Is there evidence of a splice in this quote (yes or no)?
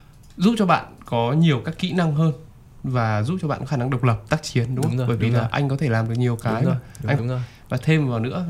yes